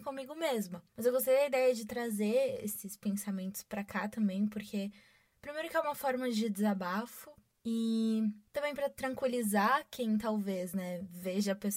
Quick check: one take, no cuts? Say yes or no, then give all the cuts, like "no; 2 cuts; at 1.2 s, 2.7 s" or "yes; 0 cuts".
yes; 0 cuts